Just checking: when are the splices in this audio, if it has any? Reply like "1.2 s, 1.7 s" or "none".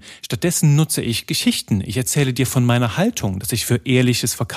none